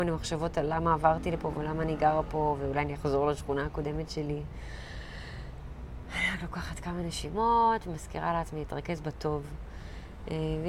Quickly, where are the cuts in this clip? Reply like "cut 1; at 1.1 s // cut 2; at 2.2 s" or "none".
none